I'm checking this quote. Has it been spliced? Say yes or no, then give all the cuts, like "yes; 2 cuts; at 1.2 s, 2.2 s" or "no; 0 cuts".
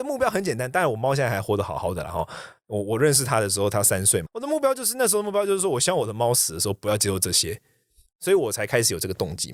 yes; 1 cut; at 4.3 s